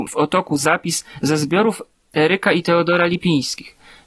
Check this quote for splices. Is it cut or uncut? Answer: uncut